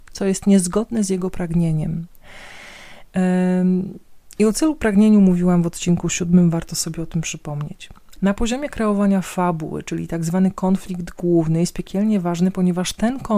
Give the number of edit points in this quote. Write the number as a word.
one